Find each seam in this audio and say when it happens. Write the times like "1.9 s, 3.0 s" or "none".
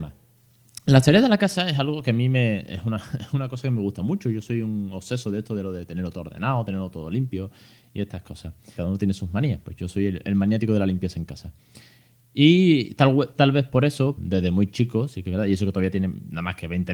8.8 s, 14.2 s